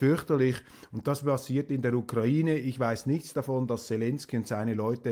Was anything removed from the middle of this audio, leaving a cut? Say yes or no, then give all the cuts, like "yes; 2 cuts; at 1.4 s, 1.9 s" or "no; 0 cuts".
no; 0 cuts